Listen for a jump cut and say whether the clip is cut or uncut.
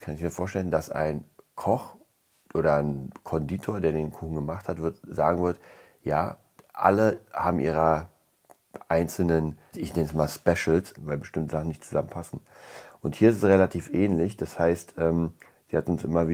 cut